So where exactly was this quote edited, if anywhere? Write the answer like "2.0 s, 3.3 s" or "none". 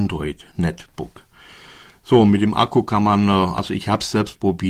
none